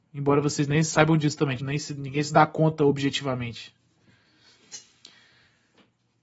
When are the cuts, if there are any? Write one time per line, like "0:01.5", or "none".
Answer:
0:01.6